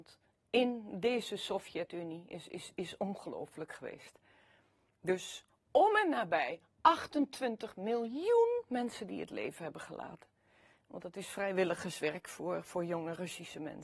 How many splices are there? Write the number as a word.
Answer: one